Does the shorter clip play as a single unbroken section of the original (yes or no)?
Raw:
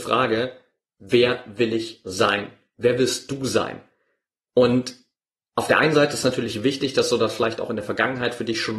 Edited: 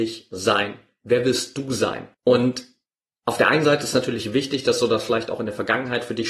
no